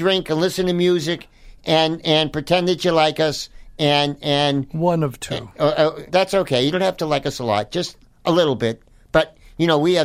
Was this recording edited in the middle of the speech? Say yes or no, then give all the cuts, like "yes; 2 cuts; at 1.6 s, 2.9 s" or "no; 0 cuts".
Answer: yes; 1 cut; at 6.1 s